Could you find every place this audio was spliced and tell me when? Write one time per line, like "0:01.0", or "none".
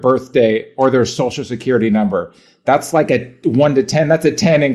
none